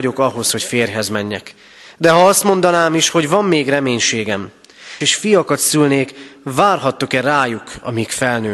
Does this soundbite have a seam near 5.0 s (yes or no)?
yes